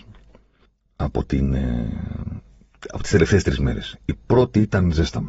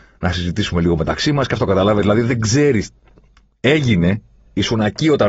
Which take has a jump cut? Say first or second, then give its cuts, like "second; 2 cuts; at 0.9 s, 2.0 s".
second; 1 cut; at 3.4 s